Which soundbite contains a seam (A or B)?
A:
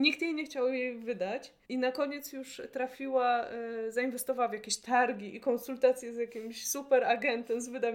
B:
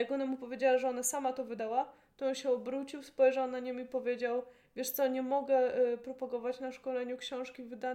A